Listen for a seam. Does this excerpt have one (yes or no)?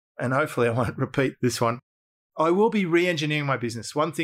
no